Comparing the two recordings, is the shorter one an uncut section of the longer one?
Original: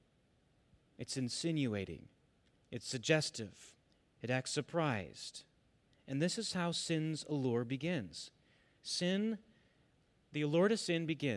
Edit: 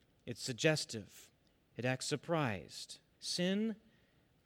no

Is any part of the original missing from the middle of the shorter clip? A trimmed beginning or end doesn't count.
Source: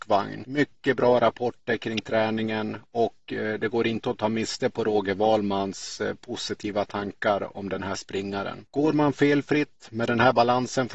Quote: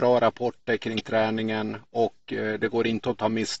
no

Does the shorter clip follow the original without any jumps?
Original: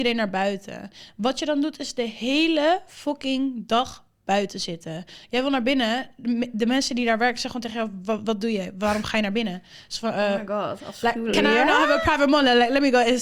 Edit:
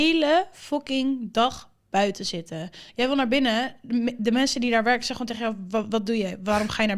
yes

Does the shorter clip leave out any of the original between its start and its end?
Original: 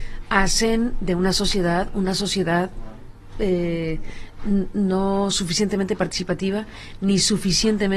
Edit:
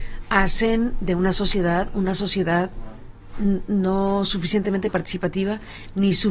yes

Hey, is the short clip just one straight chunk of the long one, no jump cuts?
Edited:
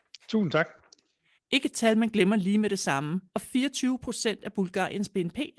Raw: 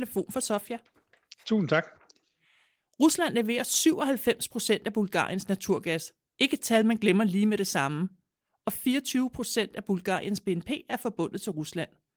no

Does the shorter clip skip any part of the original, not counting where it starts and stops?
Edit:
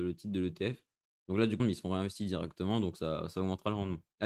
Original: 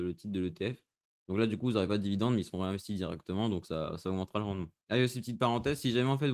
yes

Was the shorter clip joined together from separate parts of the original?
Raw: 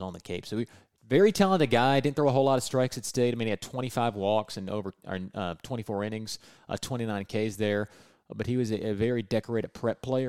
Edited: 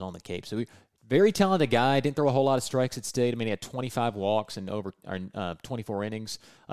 no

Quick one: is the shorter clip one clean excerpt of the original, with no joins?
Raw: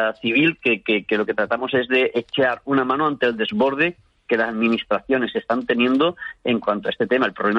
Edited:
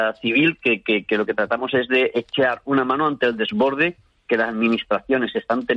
yes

